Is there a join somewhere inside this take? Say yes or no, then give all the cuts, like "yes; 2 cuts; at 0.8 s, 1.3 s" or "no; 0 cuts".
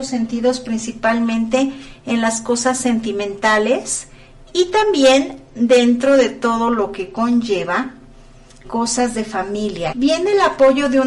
yes; 2 cuts; at 8.6 s, 9.9 s